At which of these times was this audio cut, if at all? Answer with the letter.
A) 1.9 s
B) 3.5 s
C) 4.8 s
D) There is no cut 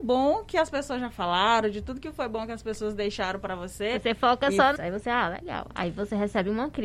C